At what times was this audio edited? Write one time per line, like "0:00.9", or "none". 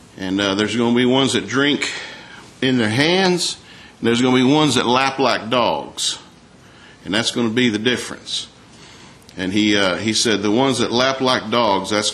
none